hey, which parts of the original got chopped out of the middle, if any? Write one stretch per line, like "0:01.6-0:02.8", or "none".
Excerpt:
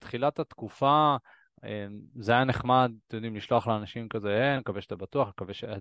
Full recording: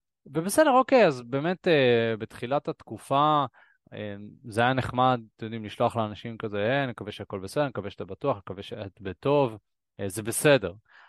0:06.9-0:07.7